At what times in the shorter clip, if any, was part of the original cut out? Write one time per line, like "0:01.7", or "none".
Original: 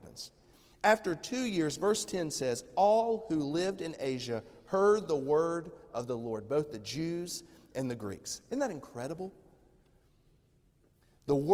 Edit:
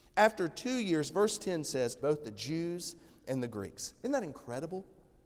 0:02.0